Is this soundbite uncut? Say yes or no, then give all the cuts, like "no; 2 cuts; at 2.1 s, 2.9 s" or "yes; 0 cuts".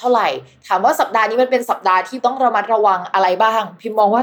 yes; 0 cuts